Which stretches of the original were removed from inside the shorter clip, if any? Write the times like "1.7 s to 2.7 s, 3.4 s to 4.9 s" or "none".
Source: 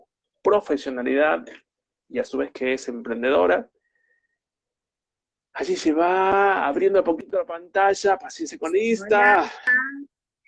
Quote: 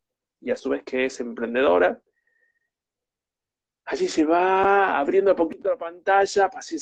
none